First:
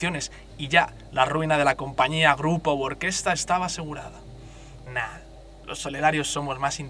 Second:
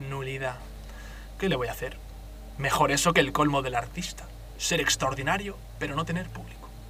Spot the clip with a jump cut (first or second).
first